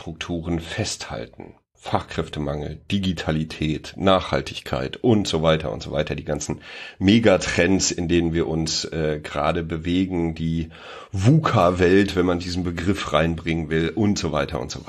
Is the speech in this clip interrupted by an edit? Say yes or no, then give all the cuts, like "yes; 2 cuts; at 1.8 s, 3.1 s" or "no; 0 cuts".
yes; 1 cut; at 1.7 s